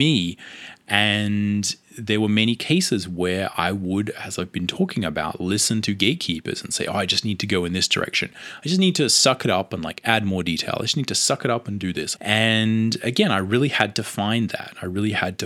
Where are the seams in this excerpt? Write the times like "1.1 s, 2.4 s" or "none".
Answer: 12.2 s